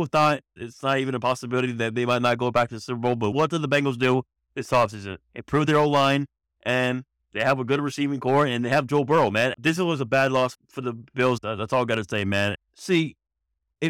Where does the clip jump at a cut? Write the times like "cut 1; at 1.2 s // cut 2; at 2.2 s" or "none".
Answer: cut 1; at 9.5 s // cut 2; at 11.4 s // cut 3; at 12.5 s